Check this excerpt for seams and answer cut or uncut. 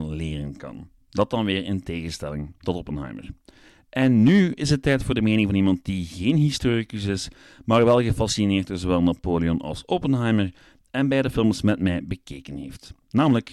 uncut